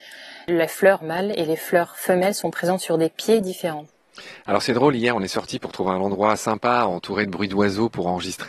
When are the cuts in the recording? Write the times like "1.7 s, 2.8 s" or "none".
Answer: none